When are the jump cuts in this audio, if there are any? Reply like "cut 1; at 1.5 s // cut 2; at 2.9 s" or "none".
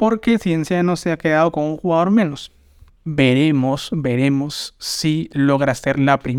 cut 1; at 2.9 s